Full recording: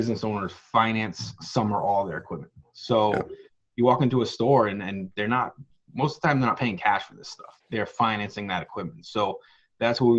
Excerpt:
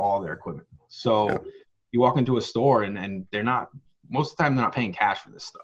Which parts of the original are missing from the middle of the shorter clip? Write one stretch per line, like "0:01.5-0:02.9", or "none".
none